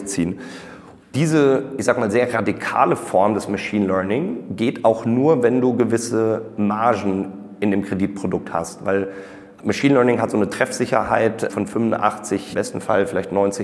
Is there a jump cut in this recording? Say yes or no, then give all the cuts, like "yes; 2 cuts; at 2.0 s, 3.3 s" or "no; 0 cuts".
no; 0 cuts